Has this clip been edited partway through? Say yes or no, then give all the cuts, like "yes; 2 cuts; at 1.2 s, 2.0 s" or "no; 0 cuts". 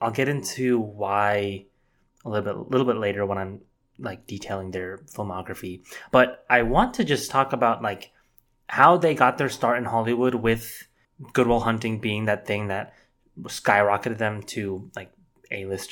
no; 0 cuts